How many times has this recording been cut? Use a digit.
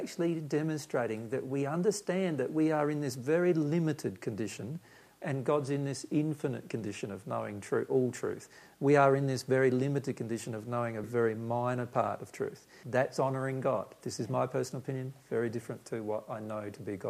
2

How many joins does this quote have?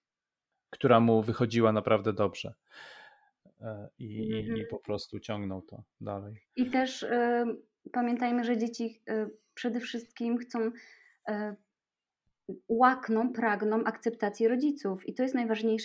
0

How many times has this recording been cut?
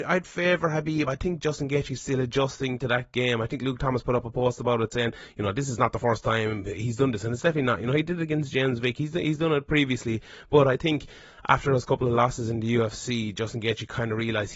0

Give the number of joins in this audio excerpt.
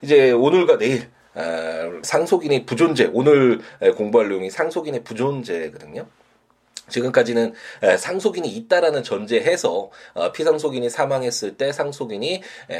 1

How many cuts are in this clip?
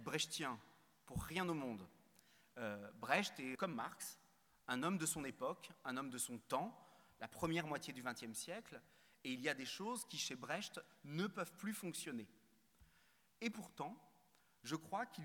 1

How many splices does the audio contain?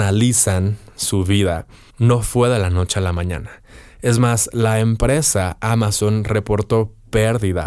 1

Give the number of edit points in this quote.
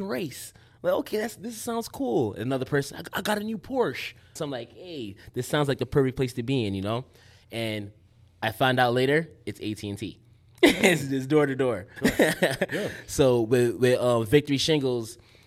2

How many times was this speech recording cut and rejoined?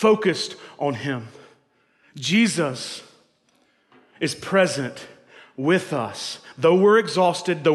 0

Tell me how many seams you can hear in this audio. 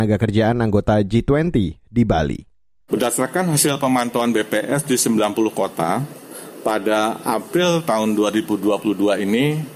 1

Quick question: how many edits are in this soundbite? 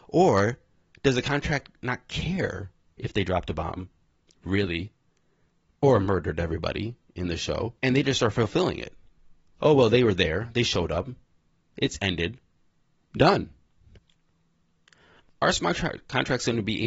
2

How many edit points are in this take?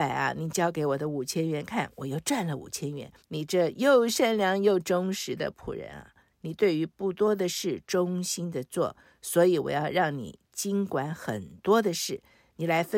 1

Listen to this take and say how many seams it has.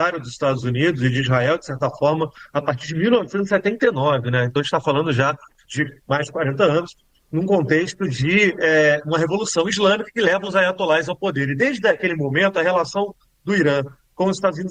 0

